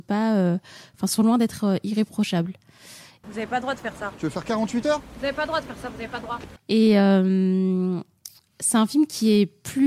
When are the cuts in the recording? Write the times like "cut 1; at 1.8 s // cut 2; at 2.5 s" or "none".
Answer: cut 1; at 3.2 s // cut 2; at 6.6 s